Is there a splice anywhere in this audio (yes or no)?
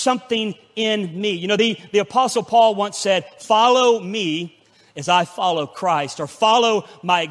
no